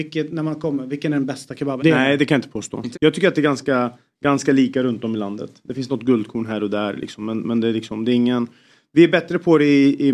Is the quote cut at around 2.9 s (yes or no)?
yes